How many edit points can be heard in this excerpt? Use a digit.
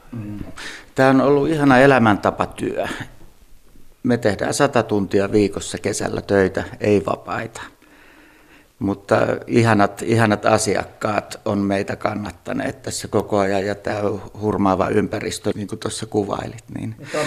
2